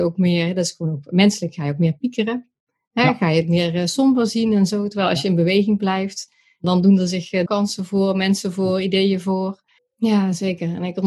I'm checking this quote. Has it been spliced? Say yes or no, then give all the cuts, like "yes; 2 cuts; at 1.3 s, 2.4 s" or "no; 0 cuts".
yes; 2 cuts; at 7.5 s, 9.8 s